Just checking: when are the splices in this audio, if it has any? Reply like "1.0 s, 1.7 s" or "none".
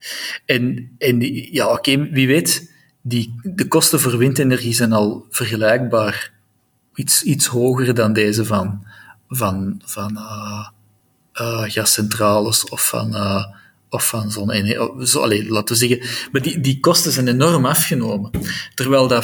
none